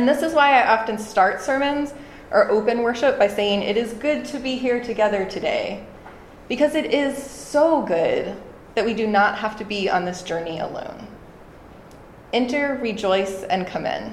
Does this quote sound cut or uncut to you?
uncut